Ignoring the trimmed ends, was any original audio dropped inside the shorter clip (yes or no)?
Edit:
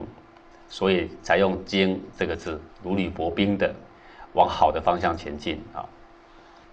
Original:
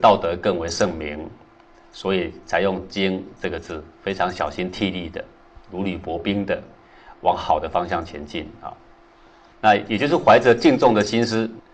yes